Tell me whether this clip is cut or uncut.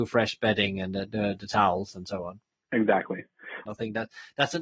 cut